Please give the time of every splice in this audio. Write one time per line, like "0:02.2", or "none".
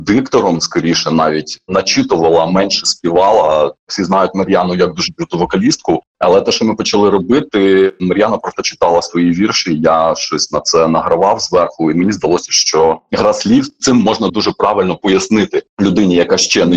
none